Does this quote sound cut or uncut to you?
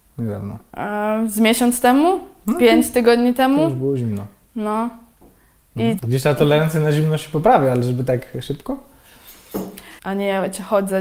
cut